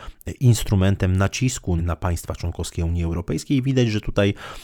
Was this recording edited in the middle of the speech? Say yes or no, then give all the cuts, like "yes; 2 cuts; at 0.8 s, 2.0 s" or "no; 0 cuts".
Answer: yes; 1 cut; at 1.8 s